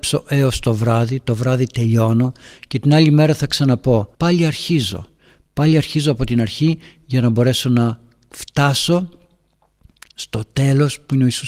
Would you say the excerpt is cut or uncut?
cut